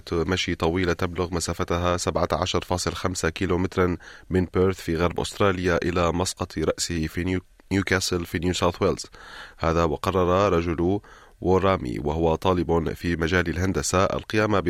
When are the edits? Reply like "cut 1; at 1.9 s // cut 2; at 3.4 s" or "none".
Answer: none